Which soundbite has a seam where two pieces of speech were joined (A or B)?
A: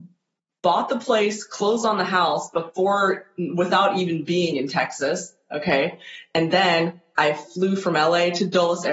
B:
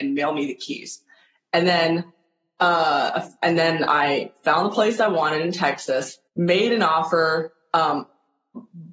B